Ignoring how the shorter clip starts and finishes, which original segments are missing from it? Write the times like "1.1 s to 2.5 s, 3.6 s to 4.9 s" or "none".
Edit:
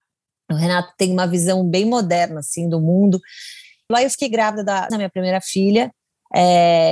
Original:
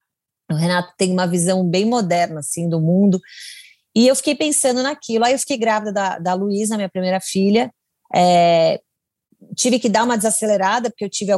3.9 s to 5.2 s, 6.2 s to 6.7 s

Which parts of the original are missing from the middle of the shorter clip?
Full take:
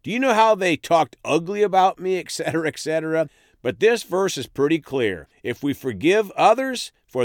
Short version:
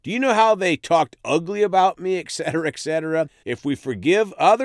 3.4 s to 5.4 s

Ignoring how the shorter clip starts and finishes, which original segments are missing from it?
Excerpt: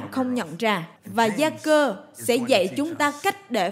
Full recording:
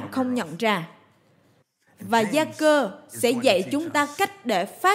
1.0 s to 1.9 s

